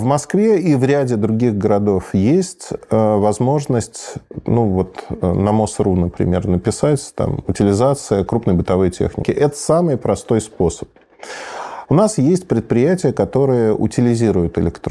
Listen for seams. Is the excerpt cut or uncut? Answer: cut